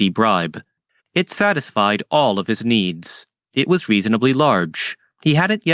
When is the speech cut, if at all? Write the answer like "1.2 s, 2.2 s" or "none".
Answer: 1.0 s